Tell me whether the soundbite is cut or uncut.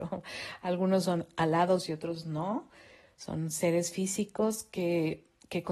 uncut